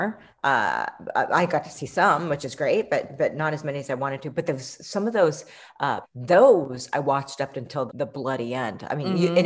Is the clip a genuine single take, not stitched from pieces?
no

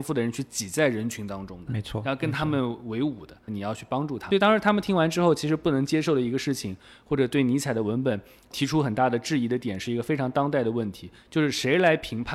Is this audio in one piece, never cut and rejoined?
no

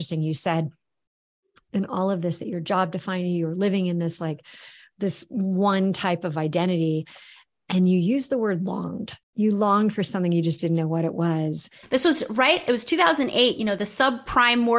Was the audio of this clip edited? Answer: yes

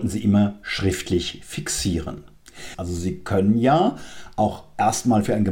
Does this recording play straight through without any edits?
no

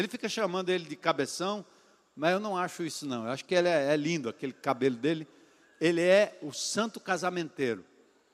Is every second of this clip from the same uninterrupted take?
yes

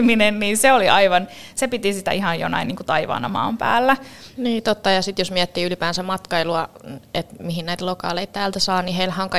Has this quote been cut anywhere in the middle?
yes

